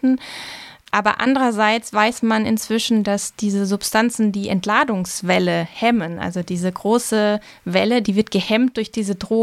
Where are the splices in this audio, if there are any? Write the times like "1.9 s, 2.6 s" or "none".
8.0 s